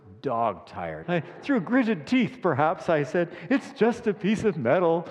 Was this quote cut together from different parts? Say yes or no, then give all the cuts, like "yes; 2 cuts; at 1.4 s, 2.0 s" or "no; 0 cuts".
yes; 1 cut; at 1.0 s